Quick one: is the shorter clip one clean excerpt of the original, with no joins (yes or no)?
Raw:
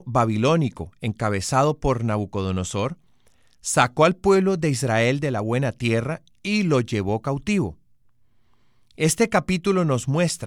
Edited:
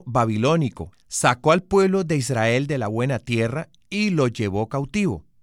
no